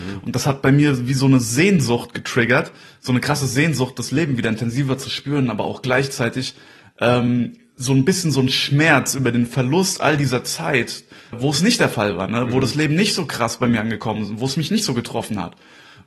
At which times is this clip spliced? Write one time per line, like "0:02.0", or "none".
0:11.3